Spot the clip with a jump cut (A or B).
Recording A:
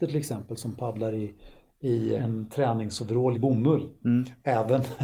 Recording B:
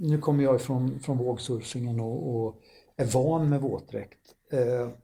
A